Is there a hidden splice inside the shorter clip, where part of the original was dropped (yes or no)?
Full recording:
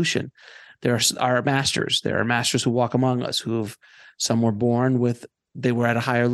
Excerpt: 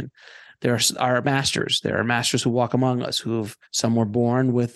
yes